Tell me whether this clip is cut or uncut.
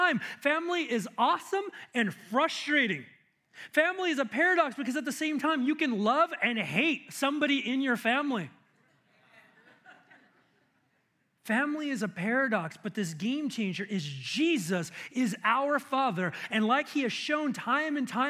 uncut